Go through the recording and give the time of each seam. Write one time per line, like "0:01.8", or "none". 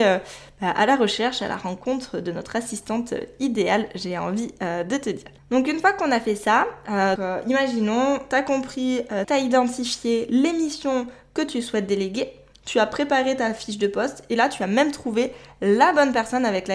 0:07.2
0:09.2